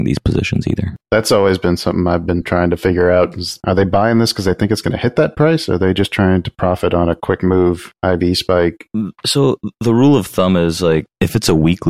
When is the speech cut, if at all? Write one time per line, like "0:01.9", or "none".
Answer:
0:01.0